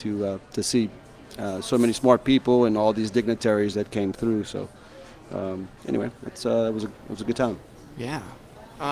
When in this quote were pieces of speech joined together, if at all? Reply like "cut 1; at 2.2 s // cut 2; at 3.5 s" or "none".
cut 1; at 5.8 s